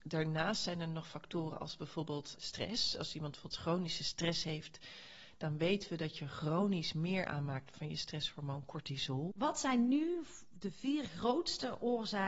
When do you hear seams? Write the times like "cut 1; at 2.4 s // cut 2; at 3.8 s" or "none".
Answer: cut 1; at 2.4 s // cut 2; at 9.3 s